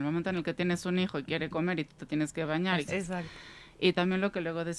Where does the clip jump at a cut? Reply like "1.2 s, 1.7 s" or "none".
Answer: 2.9 s